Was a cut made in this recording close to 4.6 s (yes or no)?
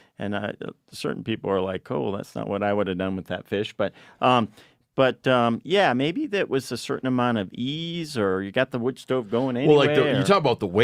no